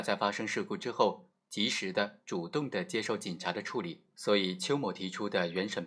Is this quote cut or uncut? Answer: cut